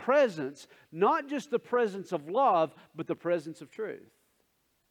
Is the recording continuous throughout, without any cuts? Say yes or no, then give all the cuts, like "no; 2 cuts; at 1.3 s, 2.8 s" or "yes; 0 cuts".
yes; 0 cuts